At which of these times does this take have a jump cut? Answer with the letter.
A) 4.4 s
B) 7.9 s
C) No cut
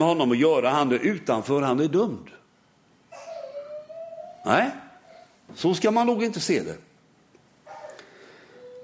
C